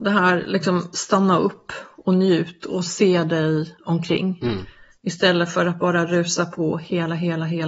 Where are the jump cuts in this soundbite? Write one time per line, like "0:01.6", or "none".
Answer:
none